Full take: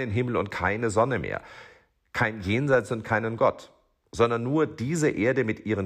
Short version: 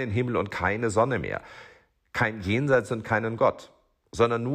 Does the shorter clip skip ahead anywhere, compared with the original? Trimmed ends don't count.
no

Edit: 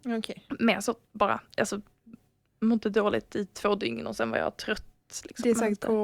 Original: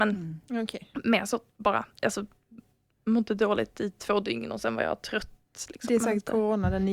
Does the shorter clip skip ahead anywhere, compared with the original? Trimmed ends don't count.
no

